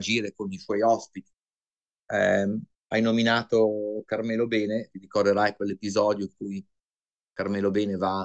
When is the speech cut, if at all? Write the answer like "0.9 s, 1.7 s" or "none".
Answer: 1.9 s, 4.9 s